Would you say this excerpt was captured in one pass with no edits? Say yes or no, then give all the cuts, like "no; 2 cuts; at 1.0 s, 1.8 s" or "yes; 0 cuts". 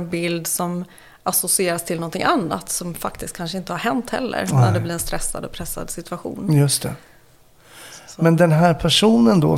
yes; 0 cuts